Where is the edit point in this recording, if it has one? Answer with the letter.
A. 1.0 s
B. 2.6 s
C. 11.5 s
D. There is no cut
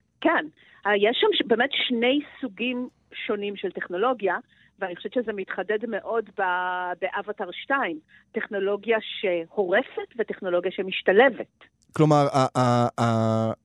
D